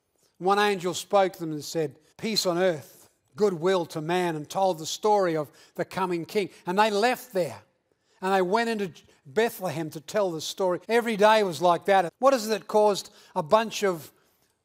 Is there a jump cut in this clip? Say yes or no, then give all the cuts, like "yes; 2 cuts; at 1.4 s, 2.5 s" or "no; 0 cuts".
yes; 3 cuts; at 2.1 s, 10.8 s, 12.1 s